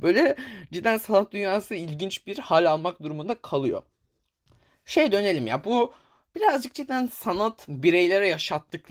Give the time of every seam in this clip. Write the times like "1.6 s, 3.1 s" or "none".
none